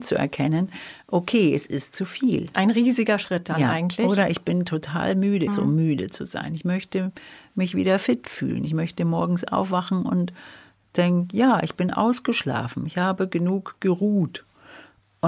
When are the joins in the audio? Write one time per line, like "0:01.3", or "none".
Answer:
0:05.5